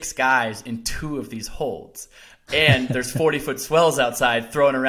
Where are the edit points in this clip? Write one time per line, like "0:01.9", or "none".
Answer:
none

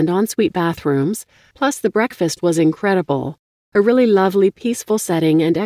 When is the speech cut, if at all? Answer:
none

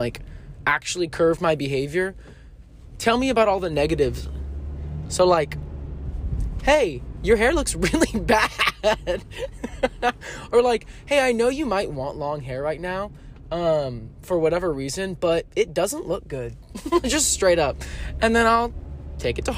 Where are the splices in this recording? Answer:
none

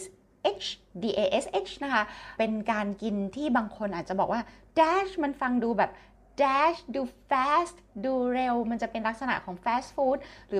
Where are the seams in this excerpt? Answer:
0:02.4

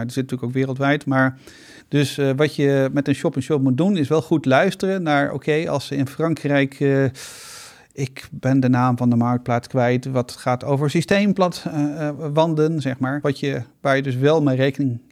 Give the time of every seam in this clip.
0:01.8
0:13.2

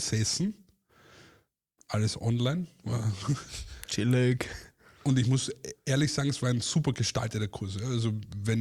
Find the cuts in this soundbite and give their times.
none

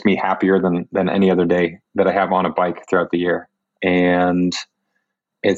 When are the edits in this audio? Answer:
0:03.7

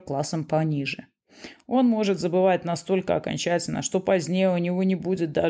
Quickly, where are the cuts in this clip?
0:01.5

